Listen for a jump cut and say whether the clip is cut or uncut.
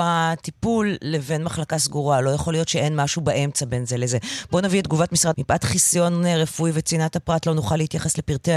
cut